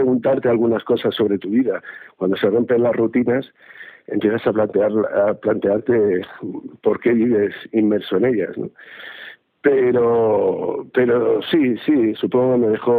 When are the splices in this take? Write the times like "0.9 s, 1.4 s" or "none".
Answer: none